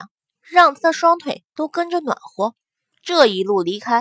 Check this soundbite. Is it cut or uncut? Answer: cut